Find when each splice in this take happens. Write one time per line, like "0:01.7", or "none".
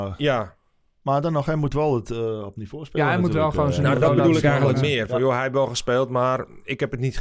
none